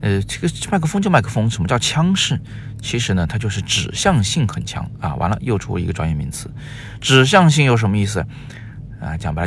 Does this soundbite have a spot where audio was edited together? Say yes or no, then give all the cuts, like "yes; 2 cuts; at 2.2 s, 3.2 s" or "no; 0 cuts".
no; 0 cuts